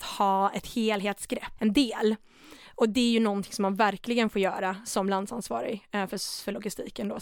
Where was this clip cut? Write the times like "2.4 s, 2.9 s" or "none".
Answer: 1.6 s